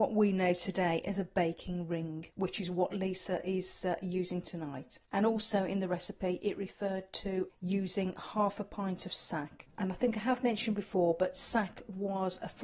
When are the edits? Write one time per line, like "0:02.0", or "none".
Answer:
none

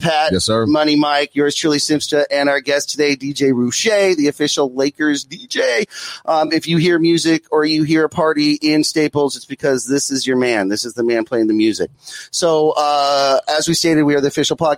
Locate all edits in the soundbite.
none

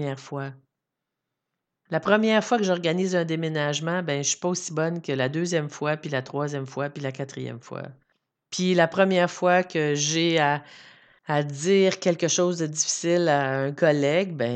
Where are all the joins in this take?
none

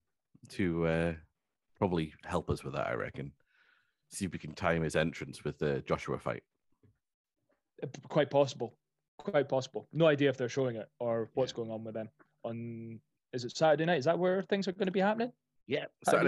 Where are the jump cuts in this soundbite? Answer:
none

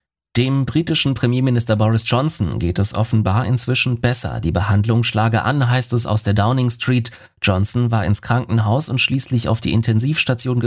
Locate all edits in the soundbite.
none

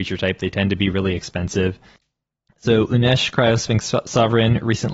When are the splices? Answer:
0:02.0

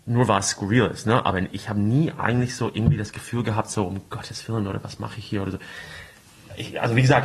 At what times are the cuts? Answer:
none

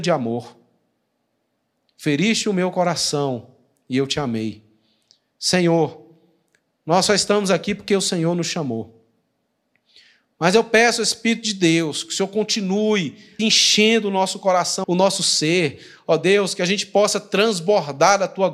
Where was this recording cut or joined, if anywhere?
0:13.4
0:14.8

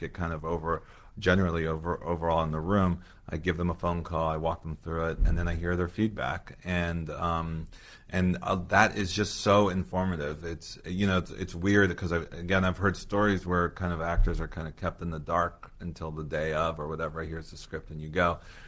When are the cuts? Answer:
none

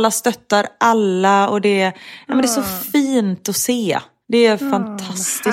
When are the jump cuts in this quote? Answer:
none

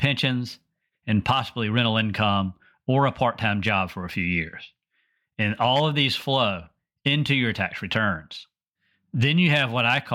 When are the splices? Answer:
0:00.9

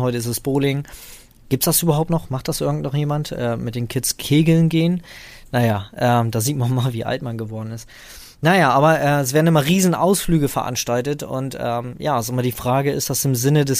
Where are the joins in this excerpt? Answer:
none

